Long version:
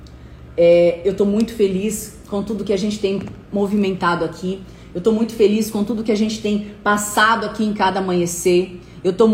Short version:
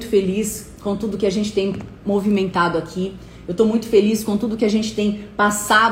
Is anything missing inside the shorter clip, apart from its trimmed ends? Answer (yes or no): no